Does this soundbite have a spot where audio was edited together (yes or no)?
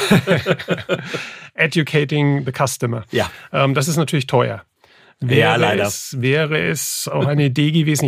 no